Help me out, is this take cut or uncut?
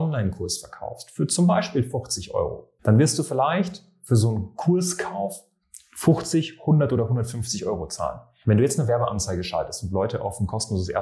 cut